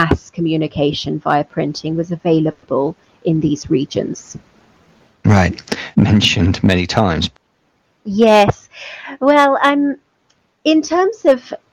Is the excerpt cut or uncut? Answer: cut